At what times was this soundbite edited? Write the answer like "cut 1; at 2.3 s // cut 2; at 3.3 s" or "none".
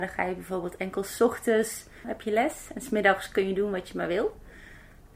cut 1; at 2.0 s